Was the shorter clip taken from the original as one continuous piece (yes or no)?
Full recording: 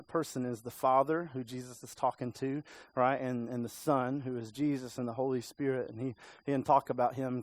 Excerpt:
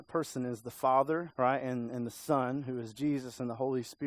no